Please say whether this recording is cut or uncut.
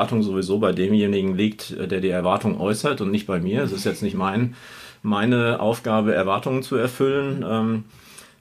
uncut